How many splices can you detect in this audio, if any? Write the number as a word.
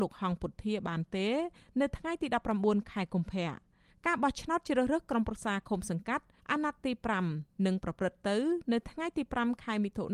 zero